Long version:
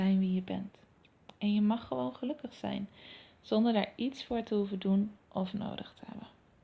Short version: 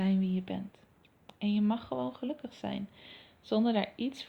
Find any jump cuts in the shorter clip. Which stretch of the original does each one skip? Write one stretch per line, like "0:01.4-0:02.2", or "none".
none